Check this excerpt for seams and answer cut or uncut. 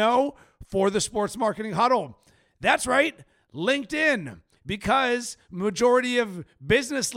cut